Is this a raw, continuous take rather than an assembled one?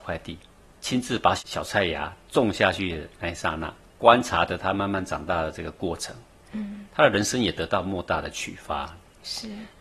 yes; 0 cuts

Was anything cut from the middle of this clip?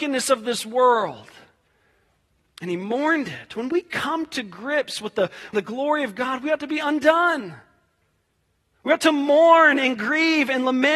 yes; 1 cut; at 5.5 s

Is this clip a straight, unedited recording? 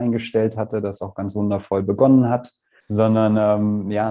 no; 1 cut; at 2.8 s

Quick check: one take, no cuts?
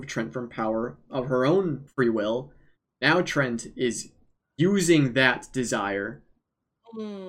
no; 1 cut; at 1.9 s

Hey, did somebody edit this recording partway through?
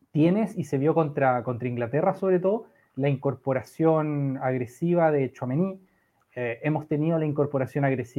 no; 0 cuts

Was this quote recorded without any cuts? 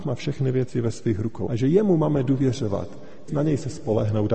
no; 2 cuts; at 1.5 s, 3.3 s

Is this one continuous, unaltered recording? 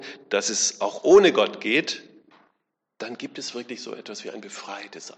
yes; 0 cuts

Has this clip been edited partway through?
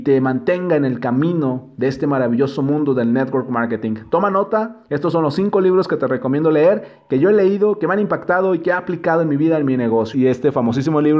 yes; 1 cut; at 10.1 s

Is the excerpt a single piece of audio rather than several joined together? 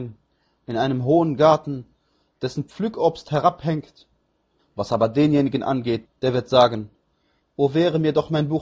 no; 2 cuts; at 4.6 s, 6.0 s

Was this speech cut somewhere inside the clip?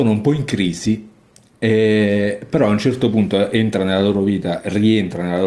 no; 0 cuts

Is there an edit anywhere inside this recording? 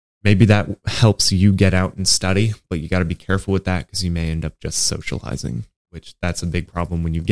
no; 0 cuts

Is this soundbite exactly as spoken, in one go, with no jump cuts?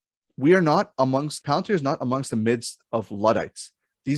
no; 1 cut; at 1.4 s

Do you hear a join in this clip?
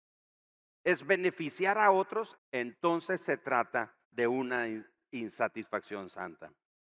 yes; 2 cuts; at 2.4 s, 4.0 s

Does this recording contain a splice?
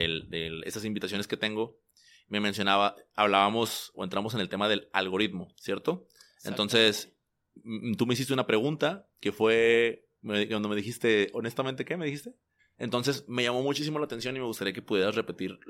yes; 2 cuts; at 10.1 s, 12.6 s

